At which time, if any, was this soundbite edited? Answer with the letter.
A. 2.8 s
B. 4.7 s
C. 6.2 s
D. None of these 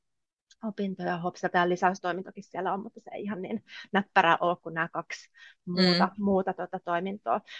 D